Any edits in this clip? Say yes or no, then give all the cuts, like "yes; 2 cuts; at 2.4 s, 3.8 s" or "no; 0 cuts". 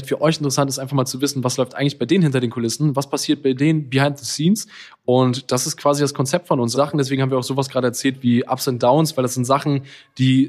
yes; 1 cut; at 6.7 s